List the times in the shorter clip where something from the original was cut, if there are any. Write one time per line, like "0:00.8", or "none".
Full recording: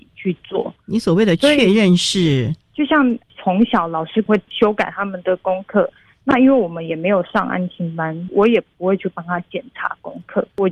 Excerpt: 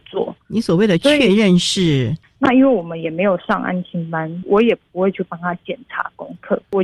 0:02.2